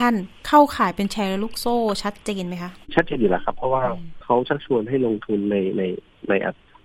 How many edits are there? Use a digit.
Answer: 1